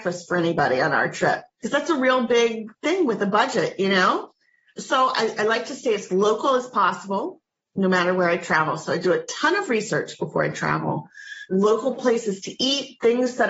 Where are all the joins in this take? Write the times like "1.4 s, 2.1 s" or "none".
none